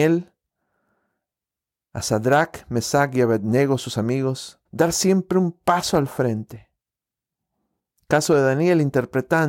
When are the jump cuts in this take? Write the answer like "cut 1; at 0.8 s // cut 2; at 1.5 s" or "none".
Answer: cut 1; at 4.7 s